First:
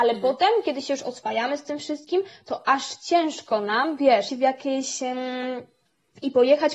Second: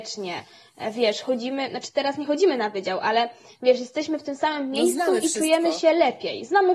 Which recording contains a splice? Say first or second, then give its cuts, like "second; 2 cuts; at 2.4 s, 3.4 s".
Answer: first; 1 cut; at 4.3 s